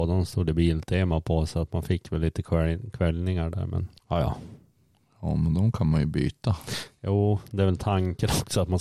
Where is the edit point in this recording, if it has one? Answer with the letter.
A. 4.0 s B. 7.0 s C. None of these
A